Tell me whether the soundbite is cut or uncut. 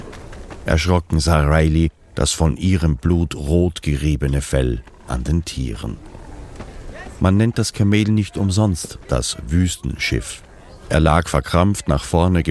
uncut